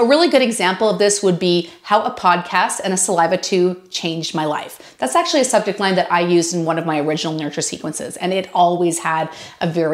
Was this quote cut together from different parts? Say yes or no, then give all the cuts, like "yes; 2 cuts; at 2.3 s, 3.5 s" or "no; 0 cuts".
no; 0 cuts